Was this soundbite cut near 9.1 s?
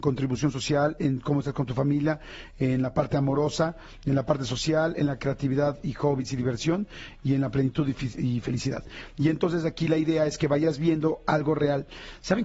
no; 0 cuts

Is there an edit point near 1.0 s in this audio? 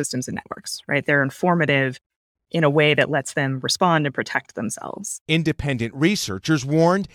no; 1 cut; at 5.3 s

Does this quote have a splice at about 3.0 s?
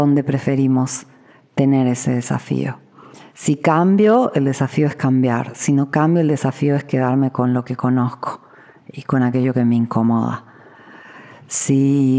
no; 0 cuts

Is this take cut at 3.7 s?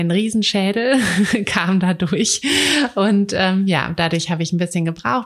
no; 0 cuts

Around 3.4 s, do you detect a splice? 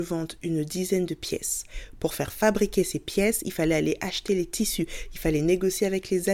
no; 1 cut; at 2.0 s

